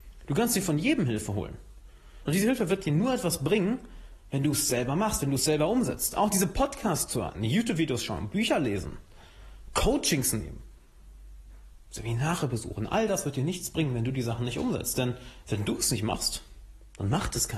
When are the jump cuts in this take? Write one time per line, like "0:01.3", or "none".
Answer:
none